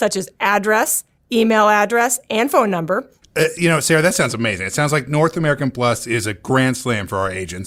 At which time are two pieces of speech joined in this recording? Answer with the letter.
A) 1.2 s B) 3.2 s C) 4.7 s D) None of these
B